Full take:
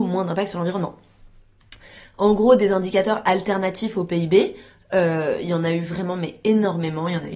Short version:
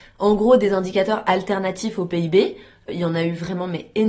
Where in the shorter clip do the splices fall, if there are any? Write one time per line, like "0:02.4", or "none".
0:02.9